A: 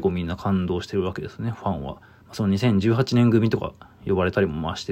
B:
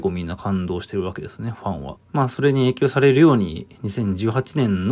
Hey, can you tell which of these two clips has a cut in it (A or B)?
B